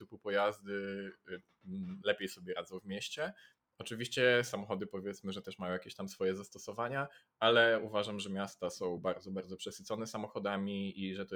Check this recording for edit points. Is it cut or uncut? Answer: uncut